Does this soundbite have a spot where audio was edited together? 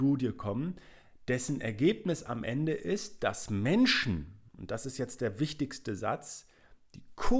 no; 0 cuts

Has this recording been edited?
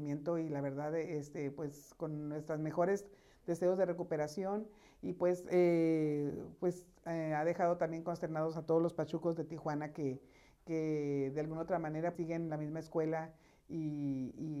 yes; 1 cut; at 12.1 s

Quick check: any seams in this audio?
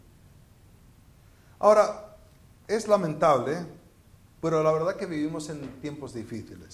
no; 0 cuts

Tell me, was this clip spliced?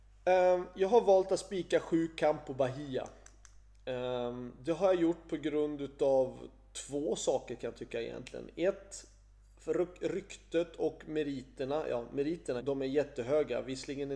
yes; 1 cut; at 12.6 s

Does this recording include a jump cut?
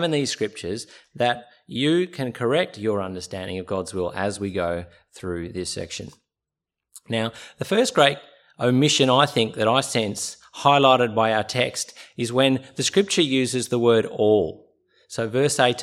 no; 0 cuts

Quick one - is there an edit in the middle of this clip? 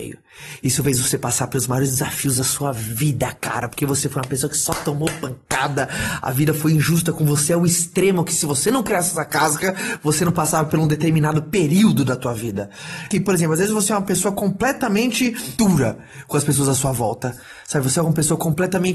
yes; 1 cut; at 13.1 s

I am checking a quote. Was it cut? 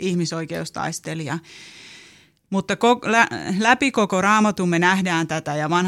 no; 0 cuts

